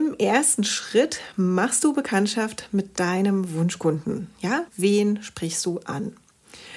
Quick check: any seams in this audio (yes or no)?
yes